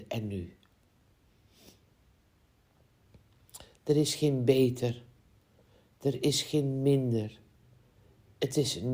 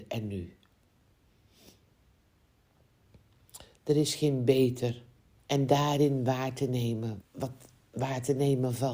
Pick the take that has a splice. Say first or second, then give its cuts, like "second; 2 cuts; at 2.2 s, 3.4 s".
second; 2 cuts; at 5.4 s, 7.2 s